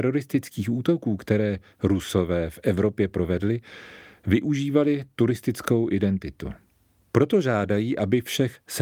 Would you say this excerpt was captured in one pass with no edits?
no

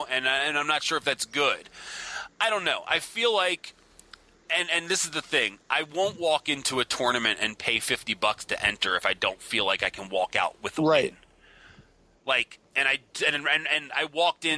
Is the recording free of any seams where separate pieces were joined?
yes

